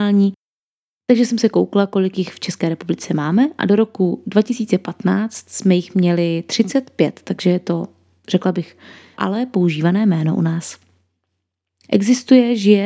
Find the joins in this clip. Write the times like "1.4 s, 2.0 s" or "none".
9.1 s, 11.8 s